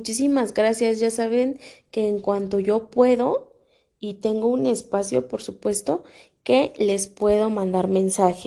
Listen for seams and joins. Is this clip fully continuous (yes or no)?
yes